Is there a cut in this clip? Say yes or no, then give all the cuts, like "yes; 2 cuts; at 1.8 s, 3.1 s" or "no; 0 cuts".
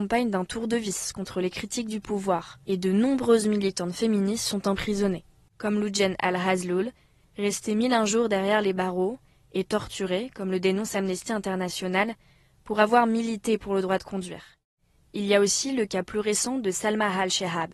no; 0 cuts